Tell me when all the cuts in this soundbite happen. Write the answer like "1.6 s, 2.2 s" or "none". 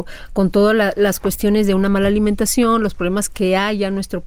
none